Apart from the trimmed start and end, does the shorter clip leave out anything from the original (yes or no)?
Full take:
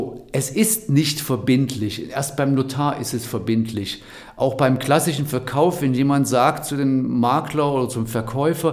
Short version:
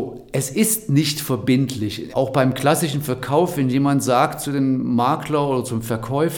yes